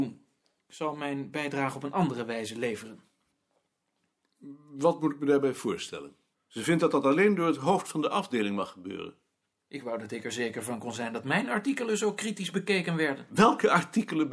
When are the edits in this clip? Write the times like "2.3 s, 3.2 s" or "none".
6.3 s